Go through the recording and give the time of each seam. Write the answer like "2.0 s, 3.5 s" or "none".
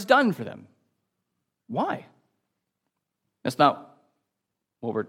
3.2 s